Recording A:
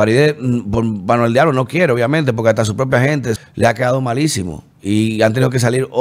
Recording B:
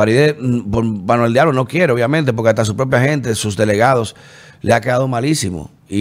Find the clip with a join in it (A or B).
A